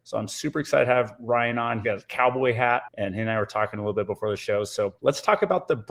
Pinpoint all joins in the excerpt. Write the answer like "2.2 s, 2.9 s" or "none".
1.8 s